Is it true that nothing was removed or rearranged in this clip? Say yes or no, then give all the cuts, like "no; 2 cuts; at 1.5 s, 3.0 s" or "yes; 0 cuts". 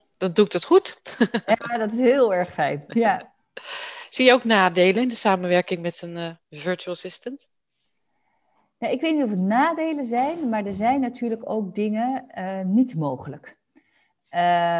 no; 1 cut; at 6.4 s